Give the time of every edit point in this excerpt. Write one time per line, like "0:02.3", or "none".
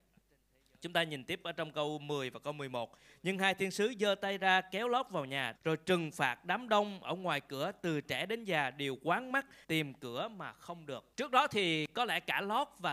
0:05.5
0:09.6
0:11.1